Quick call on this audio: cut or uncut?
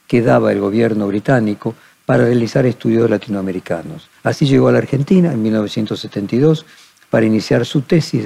cut